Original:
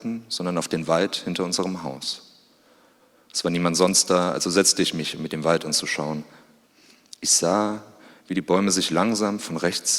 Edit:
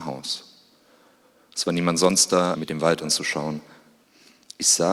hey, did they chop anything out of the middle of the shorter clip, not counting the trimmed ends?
yes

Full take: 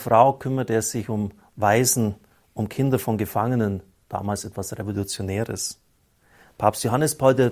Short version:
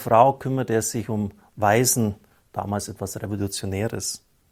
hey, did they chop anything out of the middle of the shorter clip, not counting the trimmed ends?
yes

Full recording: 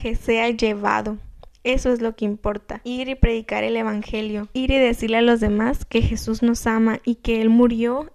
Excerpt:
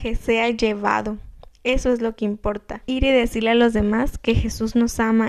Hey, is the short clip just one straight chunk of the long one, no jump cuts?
no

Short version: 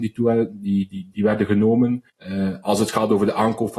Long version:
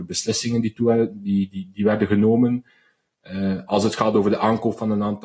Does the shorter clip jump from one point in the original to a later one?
yes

